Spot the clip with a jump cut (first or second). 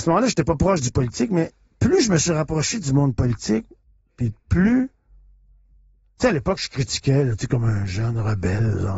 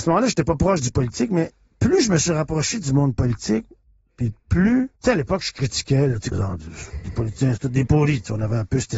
second